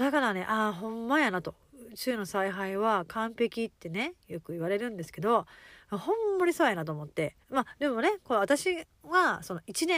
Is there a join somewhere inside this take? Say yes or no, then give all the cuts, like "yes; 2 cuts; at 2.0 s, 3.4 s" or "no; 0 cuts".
yes; 1 cut; at 7.4 s